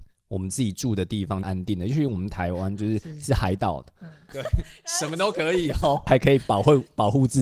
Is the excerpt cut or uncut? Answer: cut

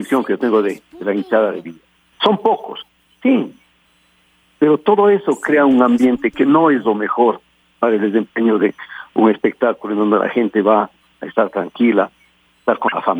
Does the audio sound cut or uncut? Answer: cut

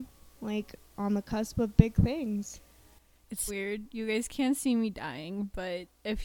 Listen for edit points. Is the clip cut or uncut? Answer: cut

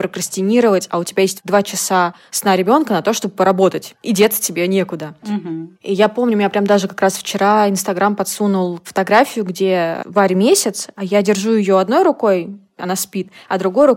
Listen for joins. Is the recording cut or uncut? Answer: cut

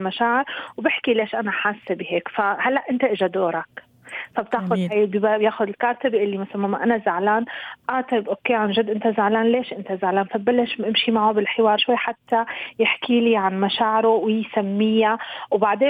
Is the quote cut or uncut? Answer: cut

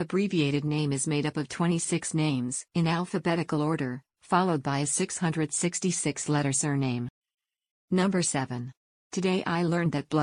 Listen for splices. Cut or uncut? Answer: cut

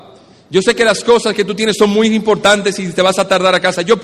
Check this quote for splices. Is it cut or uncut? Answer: uncut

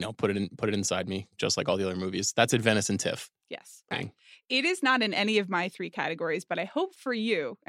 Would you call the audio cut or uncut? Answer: cut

